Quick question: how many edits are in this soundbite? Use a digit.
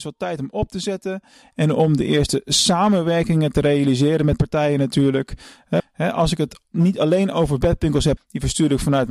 2